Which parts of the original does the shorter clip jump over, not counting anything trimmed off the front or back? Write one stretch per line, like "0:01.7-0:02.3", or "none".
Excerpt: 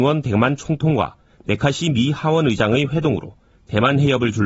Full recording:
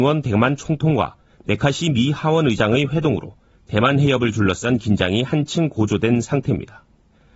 none